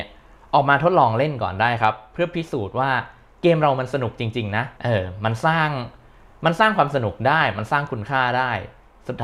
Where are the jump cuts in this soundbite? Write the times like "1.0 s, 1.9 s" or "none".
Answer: 4.7 s